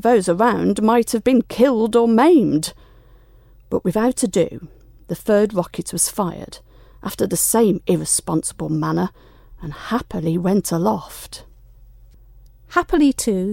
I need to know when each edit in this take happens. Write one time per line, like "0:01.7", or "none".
none